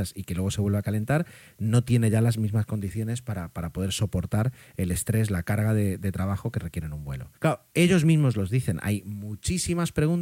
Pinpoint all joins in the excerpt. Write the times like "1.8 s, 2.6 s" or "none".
7.4 s